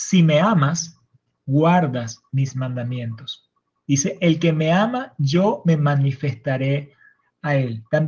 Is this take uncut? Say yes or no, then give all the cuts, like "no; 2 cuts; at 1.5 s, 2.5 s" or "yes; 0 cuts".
yes; 0 cuts